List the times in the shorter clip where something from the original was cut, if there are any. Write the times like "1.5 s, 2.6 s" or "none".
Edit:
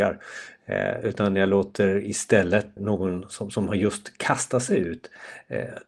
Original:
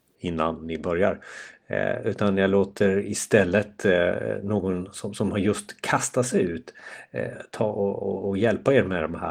2.8 s